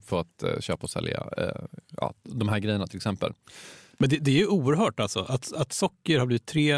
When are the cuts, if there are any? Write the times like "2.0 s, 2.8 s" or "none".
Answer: none